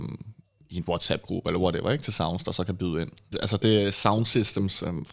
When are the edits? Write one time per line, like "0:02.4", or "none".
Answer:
0:03.3